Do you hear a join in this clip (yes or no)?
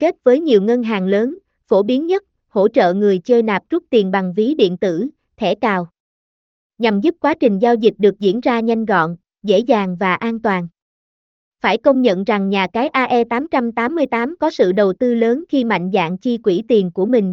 no